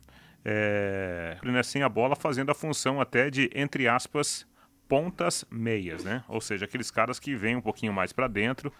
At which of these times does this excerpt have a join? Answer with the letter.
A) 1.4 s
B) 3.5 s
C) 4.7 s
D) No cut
A